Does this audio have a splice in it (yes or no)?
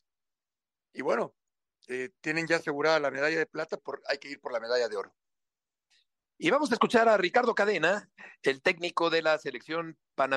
yes